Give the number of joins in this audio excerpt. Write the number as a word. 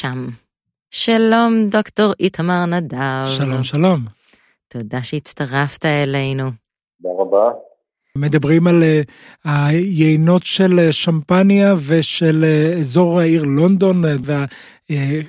two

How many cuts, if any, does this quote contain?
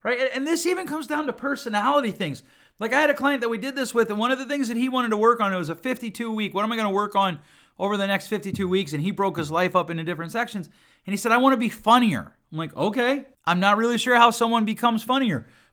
one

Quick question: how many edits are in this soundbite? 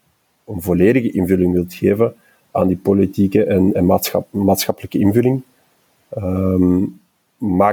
one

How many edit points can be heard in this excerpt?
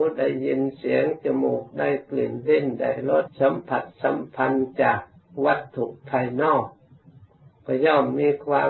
one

